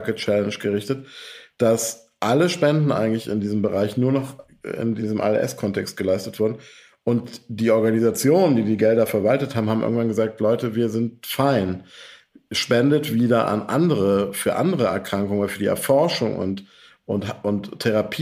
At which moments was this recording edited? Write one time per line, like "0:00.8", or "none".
none